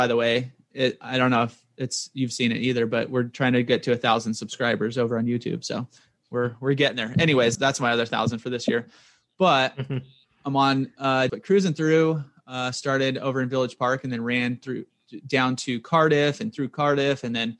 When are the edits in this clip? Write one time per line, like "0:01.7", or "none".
0:07.6
0:11.3